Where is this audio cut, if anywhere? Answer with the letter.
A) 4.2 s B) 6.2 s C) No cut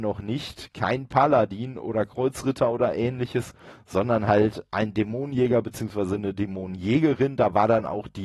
C